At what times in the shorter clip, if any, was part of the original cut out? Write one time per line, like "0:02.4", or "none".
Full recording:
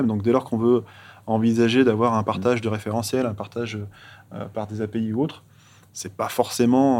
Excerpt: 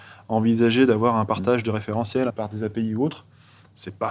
0:02.3